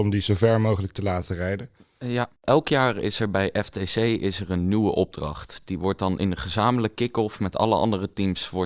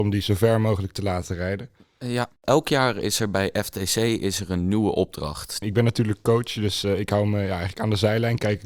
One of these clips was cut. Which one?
second; 1 cut; at 5.6 s

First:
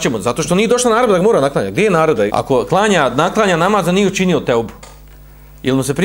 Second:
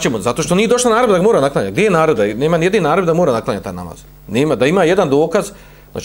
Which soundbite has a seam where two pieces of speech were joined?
first; 1 cut; at 2.3 s

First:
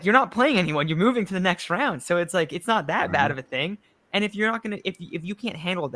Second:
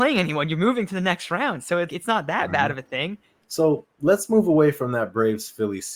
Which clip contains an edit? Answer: second; 2 cuts; at 1.9 s, 3.4 s

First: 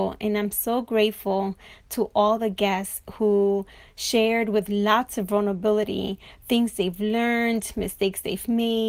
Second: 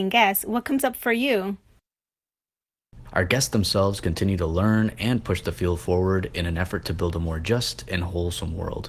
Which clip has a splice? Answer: second; 1 cut; at 3.1 s

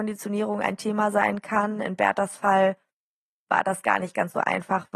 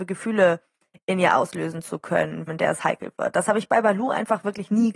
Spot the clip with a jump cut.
second; 1 cut; at 2.5 s

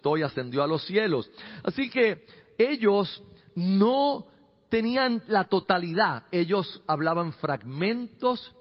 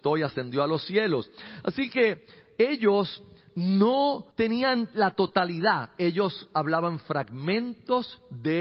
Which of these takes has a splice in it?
second; 1 cut; at 4.3 s

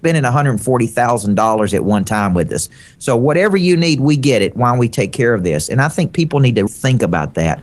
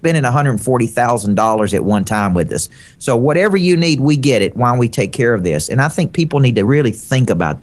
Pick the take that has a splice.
first; 1 cut; at 6.7 s

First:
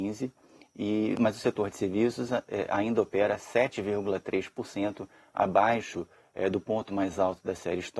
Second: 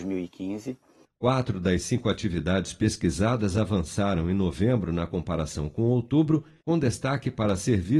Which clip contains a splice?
second; 1 cut; at 1.0 s

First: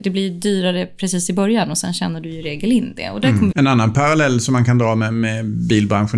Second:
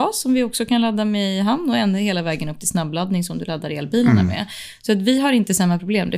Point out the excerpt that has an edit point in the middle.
first; 1 cut; at 3.5 s

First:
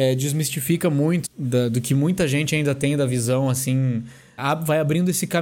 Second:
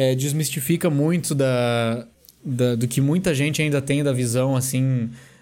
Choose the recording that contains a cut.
first; 2 cuts; at 1.2 s, 4.4 s

